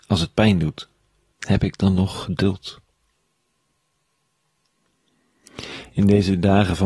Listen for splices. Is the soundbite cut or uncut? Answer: cut